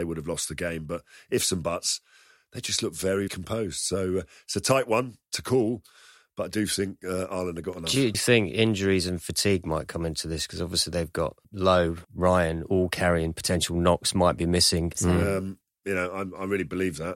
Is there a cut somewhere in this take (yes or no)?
yes